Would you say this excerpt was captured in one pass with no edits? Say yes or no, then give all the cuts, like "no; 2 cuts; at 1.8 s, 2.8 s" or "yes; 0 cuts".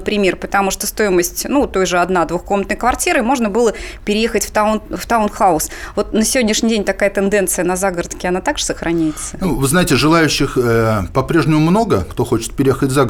yes; 0 cuts